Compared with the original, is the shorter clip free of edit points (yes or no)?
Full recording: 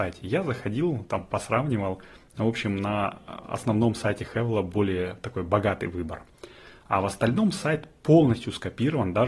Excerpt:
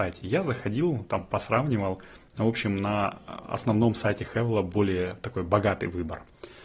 yes